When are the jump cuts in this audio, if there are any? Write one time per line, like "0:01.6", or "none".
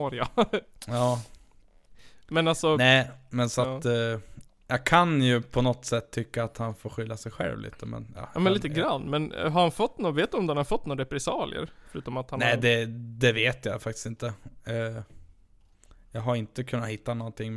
0:04.5